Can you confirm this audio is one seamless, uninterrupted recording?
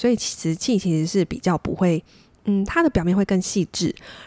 yes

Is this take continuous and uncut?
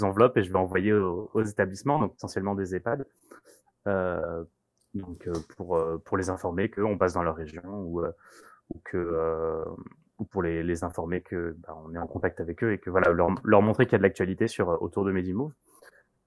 yes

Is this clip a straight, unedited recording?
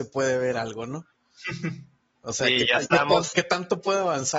no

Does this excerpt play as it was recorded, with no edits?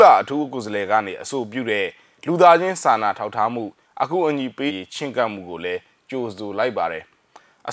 no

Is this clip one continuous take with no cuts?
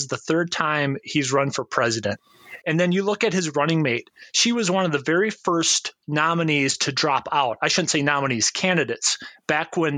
no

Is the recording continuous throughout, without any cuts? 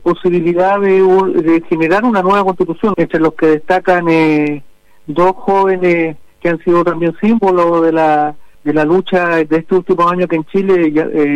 no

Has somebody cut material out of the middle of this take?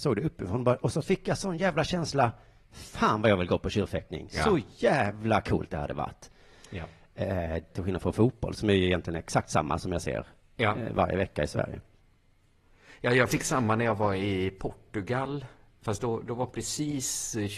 yes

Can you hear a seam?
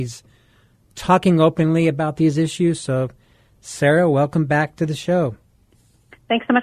no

